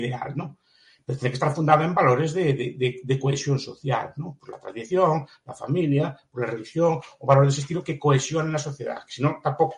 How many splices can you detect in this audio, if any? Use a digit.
0